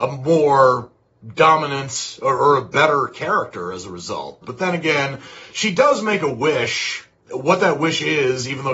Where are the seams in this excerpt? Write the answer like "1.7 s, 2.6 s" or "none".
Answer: 4.4 s